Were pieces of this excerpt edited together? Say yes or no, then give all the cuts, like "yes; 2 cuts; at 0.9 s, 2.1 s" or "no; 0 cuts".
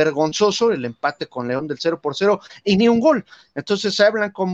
no; 0 cuts